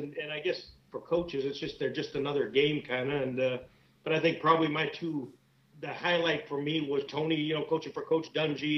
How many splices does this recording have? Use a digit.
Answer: 2